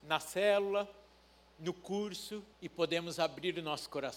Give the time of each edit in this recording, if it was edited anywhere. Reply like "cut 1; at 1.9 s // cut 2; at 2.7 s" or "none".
cut 1; at 2.5 s

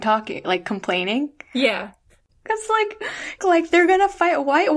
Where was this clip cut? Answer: cut 1; at 2.3 s // cut 2; at 3.4 s

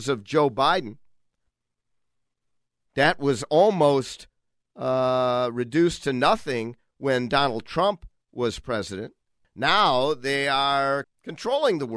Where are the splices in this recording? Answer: cut 1; at 9.4 s // cut 2; at 11.0 s

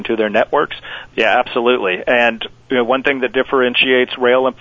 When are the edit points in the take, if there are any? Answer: cut 1; at 1.1 s

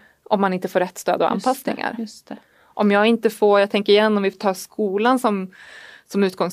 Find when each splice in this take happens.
none

